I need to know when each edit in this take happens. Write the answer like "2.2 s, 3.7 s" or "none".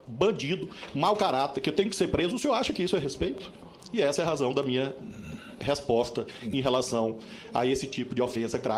none